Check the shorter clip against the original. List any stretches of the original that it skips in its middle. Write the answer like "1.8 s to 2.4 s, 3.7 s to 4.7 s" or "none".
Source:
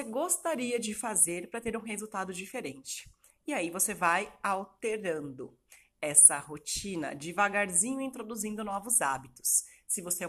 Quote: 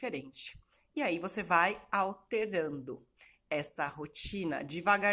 none